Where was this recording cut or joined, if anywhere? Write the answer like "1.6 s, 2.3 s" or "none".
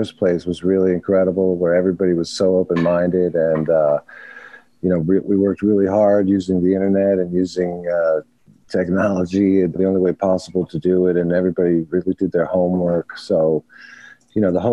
9.8 s

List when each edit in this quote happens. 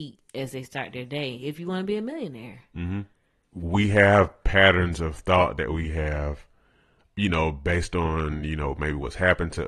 3.4 s, 7.1 s

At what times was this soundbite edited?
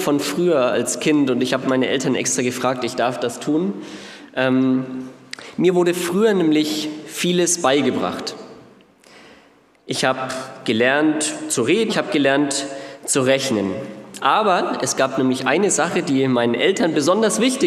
11.9 s

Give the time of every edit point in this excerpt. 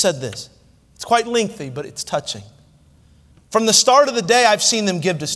3.3 s

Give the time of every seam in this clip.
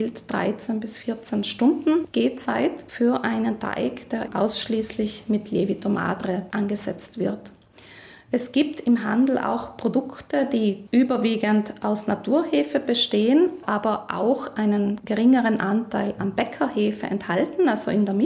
none

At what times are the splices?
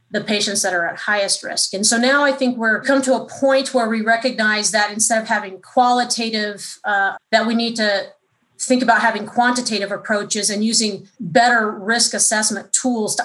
7.1 s, 11.1 s

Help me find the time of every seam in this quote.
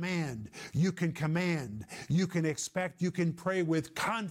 none

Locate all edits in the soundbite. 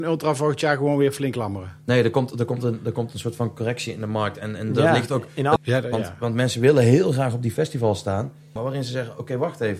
5.6 s, 8.6 s

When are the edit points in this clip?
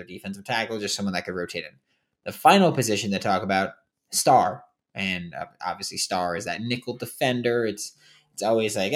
none

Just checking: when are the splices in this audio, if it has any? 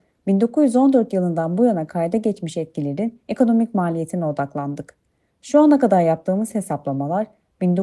none

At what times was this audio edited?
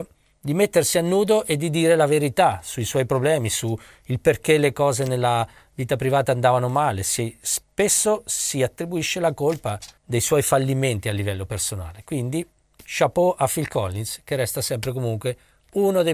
none

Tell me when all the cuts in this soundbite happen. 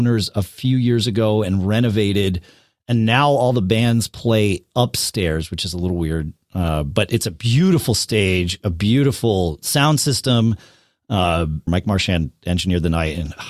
11.7 s

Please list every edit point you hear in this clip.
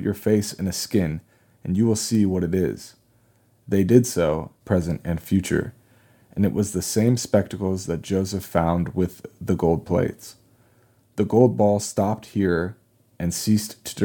4.6 s

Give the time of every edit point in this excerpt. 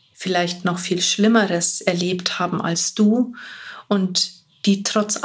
none

